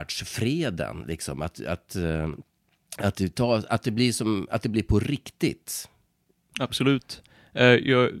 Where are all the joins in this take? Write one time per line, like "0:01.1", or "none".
0:01.5
0:06.5

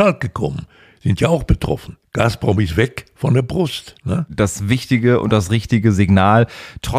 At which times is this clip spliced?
0:02.0

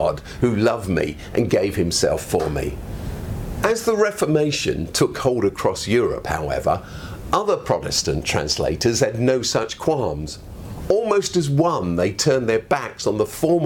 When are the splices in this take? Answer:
none

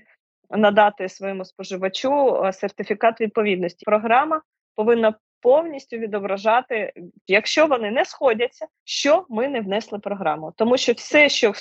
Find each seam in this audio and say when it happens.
0:03.8
0:07.3
0:08.8

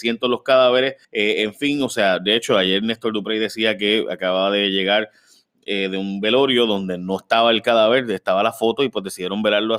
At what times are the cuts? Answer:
0:01.0

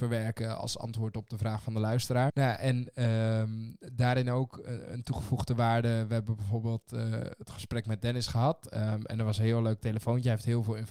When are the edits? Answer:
0:02.3

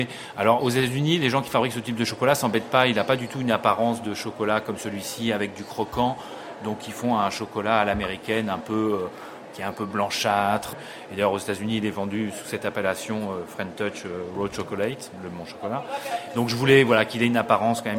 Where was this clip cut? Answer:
0:10.7

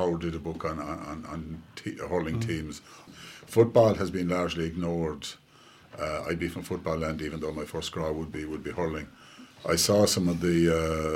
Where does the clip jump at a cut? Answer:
0:03.1
0:09.6

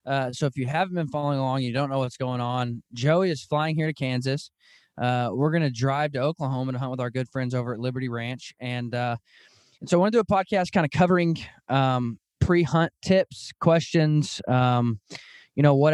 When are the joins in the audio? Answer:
none

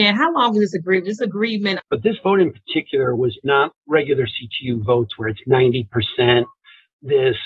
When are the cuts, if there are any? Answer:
0:01.8
0:03.7

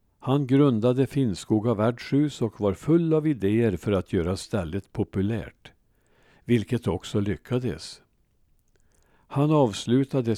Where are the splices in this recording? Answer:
none

